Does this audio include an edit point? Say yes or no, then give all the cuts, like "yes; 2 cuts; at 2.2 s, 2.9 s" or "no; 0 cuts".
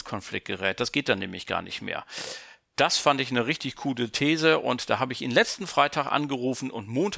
no; 0 cuts